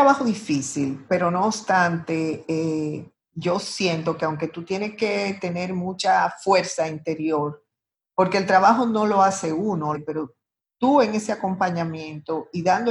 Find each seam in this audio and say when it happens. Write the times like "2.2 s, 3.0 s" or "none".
1.1 s, 9.9 s